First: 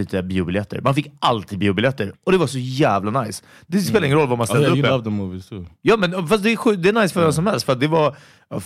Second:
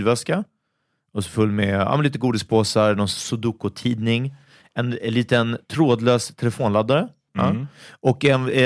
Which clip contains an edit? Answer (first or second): second